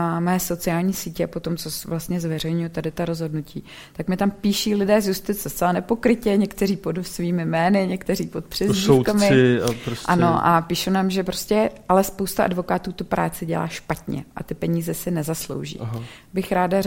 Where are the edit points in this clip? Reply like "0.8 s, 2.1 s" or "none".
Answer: none

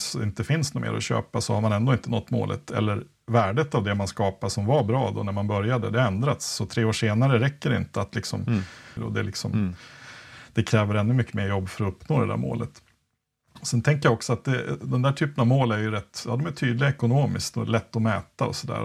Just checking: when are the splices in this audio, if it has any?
9.0 s

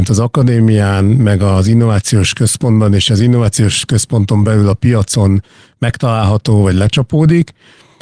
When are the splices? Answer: none

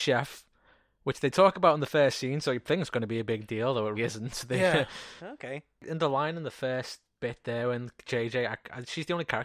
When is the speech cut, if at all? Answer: 4.0 s, 5.2 s

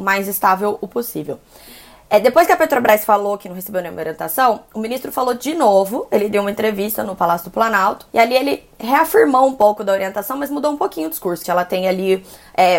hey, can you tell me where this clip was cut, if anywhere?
8.1 s, 11.4 s

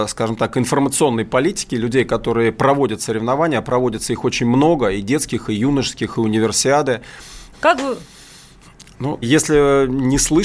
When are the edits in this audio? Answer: 7.5 s, 9.2 s

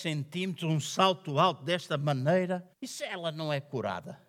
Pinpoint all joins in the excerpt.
2.7 s

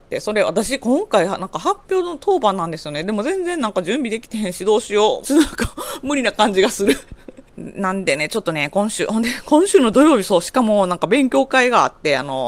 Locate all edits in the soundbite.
5.2 s, 7.5 s

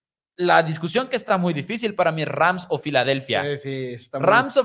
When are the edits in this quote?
none

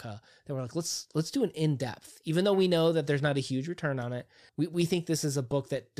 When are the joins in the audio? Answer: 4.5 s

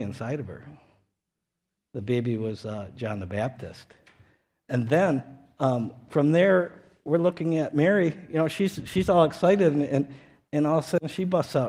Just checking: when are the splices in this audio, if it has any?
none

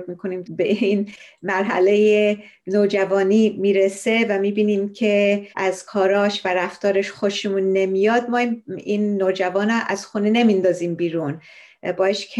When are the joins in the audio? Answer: none

